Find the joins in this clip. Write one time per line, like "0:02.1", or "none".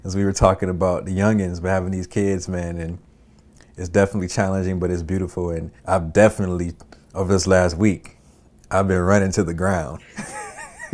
0:05.8